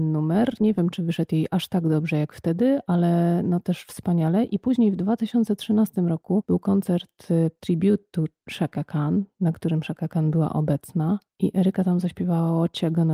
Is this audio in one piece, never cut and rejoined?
yes; 0 cuts

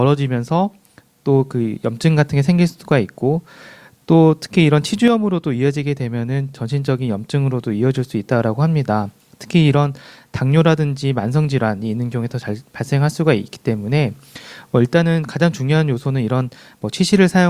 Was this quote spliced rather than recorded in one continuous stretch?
no; 0 cuts

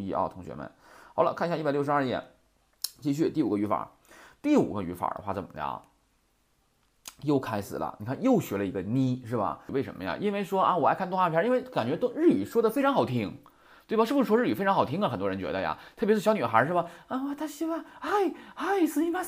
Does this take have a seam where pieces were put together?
yes; 1 cut; at 9.7 s

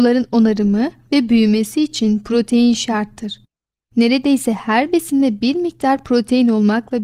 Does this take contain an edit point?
no; 0 cuts

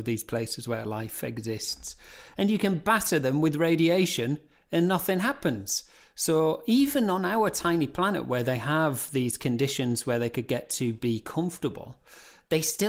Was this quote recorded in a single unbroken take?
yes; 0 cuts

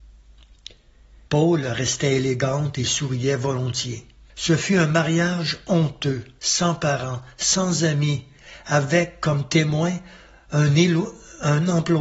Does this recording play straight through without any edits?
no; 2 cuts; at 1.3 s, 4.3 s

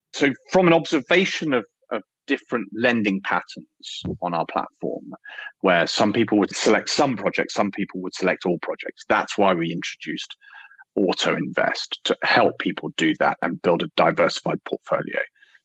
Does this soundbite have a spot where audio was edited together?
no; 0 cuts

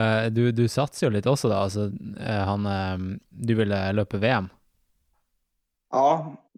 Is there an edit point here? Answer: yes; 1 cut; at 3.3 s

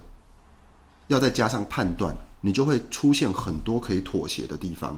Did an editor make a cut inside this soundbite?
yes; 1 cut; at 2.3 s

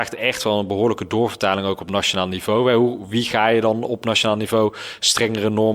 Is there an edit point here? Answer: no; 0 cuts

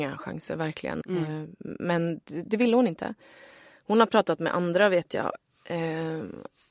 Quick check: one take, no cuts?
no; 1 cut; at 1.0 s

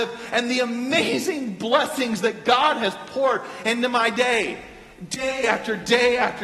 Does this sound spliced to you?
no; 0 cuts

